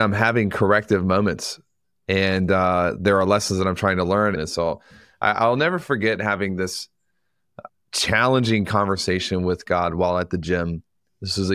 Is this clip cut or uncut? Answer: cut